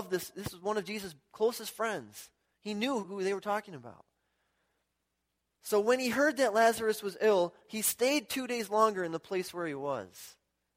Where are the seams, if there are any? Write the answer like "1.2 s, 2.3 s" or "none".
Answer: 3.0 s, 5.5 s